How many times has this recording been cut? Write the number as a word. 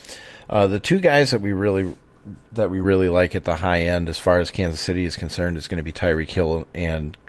one